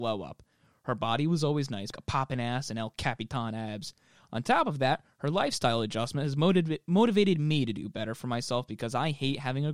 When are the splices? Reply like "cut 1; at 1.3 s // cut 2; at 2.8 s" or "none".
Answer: cut 1; at 1.9 s